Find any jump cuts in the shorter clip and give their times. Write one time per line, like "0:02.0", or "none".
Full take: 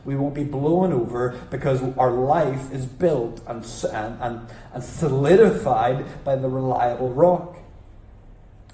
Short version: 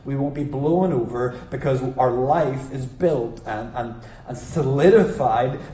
0:03.4

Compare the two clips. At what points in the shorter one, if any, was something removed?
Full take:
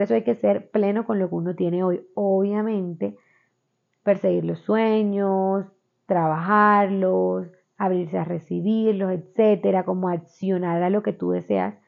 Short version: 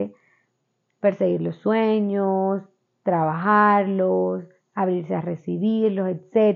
none

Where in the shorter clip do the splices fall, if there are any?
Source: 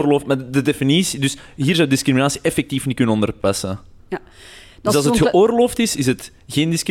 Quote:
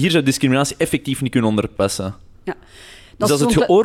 none

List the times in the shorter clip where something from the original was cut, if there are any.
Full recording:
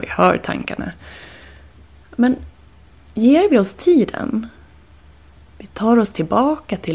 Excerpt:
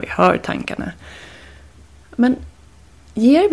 none

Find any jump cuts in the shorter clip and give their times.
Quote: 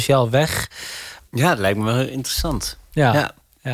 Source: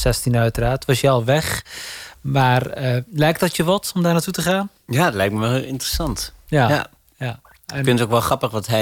0:01.3

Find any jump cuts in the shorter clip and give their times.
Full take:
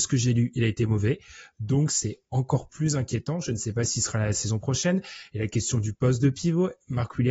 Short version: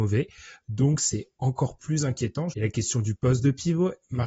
0:02.5

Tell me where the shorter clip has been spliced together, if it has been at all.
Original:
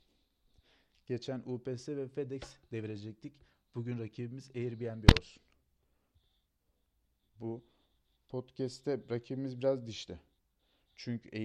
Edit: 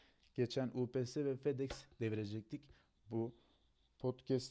0:02.9

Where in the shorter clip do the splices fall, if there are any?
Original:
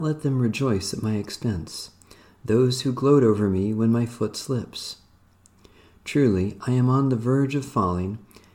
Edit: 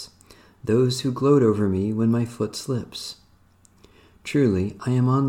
none

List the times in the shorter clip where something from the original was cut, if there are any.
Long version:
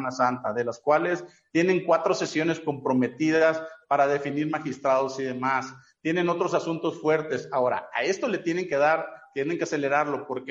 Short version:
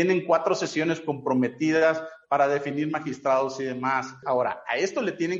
0:04.2

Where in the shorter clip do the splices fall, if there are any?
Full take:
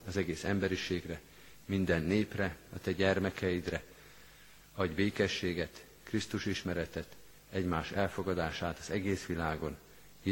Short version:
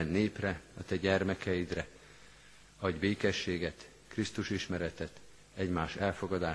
none

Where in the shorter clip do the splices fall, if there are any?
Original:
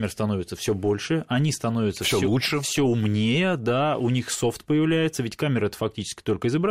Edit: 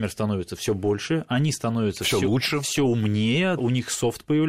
0:03.6

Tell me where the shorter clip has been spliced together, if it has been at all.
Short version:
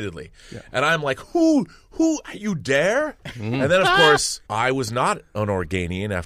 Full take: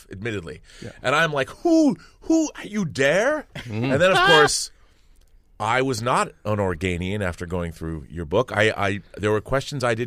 0:04.4

